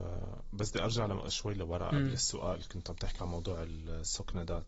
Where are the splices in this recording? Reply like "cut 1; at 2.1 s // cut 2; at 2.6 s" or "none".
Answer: none